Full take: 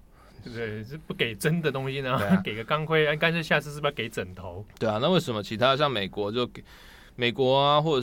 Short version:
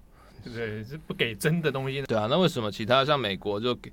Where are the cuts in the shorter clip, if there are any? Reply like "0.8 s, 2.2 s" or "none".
2.0 s